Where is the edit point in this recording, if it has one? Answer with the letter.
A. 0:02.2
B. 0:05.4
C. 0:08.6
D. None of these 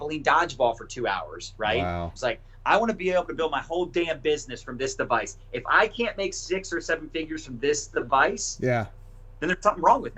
A